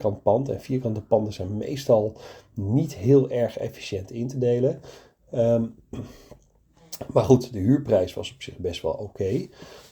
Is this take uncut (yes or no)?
yes